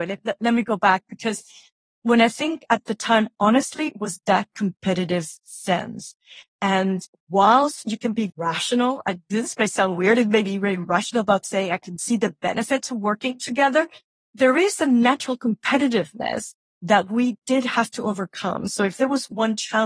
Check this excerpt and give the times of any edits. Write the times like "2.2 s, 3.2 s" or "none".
3.3 s, 8.3 s